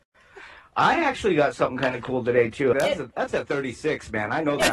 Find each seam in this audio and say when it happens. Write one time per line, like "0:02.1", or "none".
0:02.7